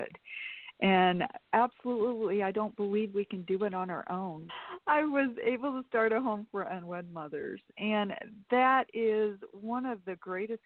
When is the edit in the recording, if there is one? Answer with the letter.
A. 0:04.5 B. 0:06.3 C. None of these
A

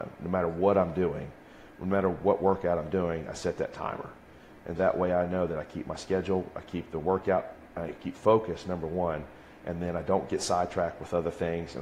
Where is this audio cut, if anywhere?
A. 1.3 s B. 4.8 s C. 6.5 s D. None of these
B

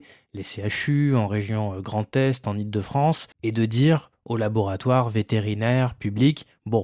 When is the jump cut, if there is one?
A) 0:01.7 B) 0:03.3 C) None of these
B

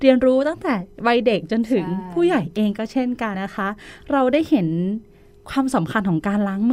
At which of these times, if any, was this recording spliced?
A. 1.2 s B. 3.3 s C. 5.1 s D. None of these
B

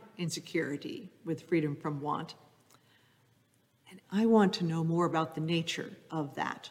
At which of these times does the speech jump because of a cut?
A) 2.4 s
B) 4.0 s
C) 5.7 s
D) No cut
B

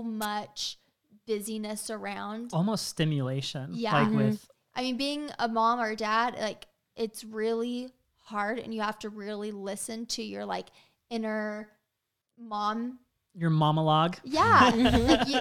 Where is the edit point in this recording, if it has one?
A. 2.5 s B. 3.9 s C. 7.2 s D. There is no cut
D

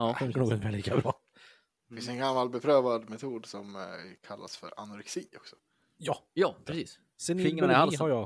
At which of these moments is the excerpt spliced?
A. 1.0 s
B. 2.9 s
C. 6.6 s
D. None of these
C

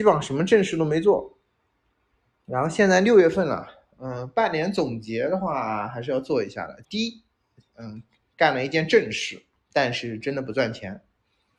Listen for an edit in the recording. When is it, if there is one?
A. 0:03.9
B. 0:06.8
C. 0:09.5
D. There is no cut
B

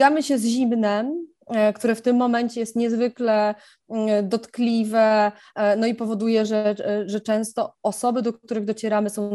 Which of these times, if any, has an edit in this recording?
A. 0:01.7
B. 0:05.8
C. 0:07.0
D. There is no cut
D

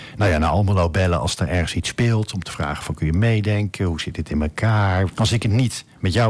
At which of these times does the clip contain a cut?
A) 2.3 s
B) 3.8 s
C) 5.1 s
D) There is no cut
C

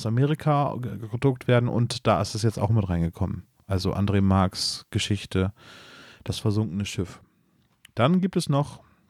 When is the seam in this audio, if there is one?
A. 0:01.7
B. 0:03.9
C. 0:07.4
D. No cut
D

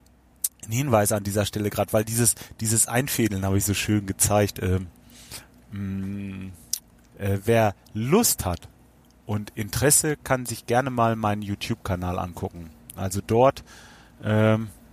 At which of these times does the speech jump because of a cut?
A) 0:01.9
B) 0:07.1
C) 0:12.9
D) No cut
B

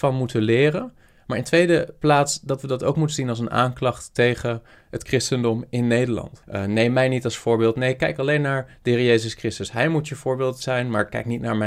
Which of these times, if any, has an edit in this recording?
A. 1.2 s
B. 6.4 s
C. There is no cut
B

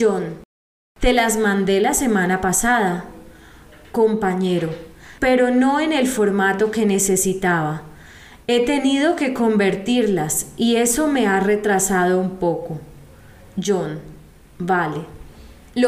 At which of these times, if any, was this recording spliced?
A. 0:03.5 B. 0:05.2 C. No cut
B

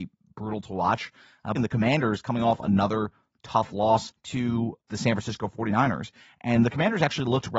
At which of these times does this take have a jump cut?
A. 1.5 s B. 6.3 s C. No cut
A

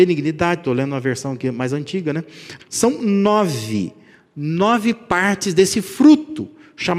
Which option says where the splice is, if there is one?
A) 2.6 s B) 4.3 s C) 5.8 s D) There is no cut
A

